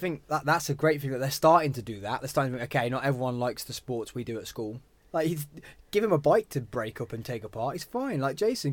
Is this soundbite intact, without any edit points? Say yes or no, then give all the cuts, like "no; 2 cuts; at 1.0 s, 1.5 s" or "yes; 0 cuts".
no; 1 cut; at 5.0 s